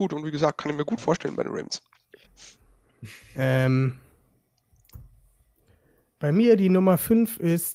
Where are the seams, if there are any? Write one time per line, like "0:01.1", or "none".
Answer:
0:02.2